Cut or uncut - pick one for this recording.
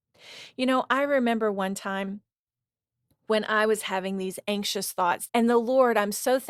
cut